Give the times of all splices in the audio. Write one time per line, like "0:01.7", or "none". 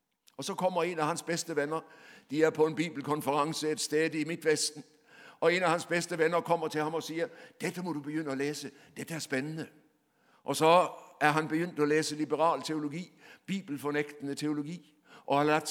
none